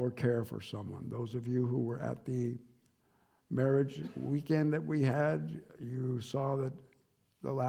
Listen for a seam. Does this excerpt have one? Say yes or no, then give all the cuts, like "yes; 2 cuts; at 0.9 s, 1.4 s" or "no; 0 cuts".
no; 0 cuts